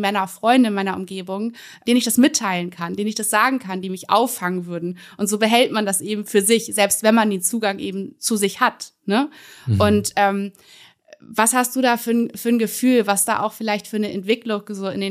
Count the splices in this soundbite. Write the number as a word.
zero